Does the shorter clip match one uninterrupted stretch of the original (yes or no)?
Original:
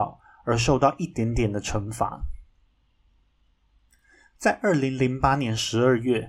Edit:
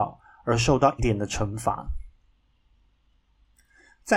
no